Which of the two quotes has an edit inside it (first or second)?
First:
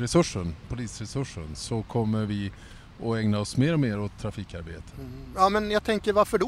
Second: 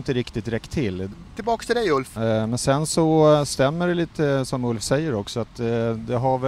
second